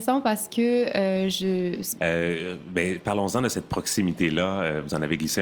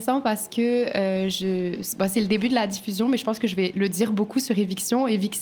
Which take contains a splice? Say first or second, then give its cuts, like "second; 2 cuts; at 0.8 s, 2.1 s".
first; 1 cut; at 2.0 s